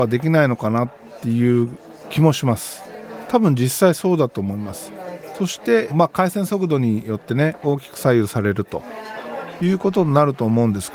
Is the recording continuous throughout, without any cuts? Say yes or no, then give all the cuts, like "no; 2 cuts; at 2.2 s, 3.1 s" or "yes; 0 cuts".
no; 1 cut; at 5.9 s